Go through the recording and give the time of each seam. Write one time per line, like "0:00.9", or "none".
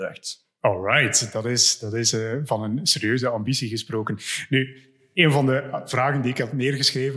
none

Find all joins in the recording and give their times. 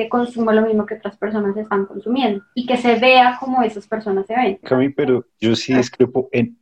0:04.6

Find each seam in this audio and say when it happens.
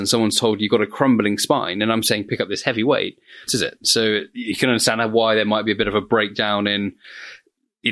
0:03.5

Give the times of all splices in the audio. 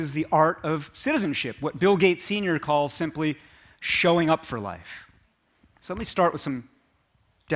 0:05.7

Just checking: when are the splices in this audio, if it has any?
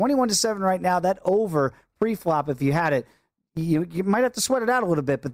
none

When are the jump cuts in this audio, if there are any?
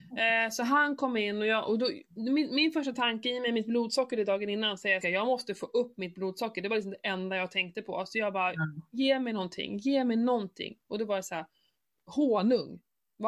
0:05.0

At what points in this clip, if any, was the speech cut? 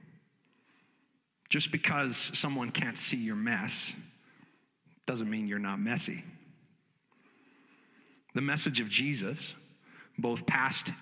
none

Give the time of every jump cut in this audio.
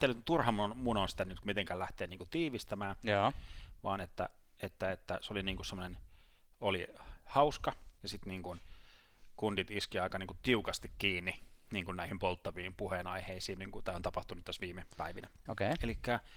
0:08.0
0:13.6
0:15.5

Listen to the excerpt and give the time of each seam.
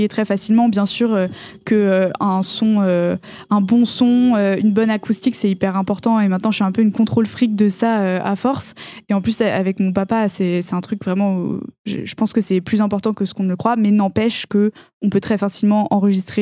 none

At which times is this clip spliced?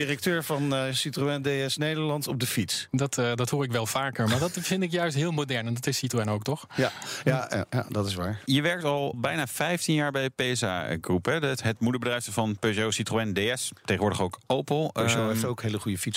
none

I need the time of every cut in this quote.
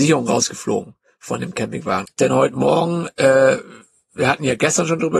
0:02.1

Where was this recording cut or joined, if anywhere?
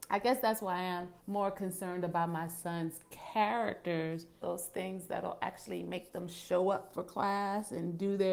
0:01.2
0:04.4

